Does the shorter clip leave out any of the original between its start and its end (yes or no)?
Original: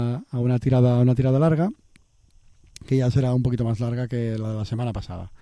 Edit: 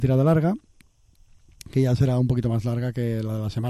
no